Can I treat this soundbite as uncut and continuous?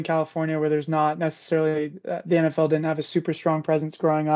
yes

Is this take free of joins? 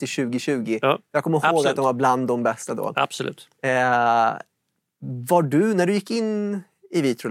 yes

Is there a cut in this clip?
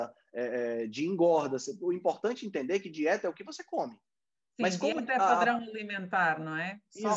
no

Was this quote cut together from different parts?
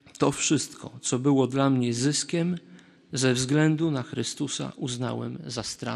no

